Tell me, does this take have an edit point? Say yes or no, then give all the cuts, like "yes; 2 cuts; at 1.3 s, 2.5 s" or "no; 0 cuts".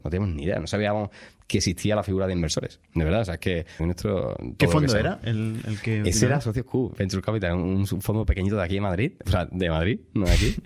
yes; 1 cut; at 3.8 s